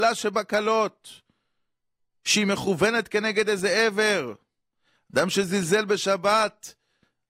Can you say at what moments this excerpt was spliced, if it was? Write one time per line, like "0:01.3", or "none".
none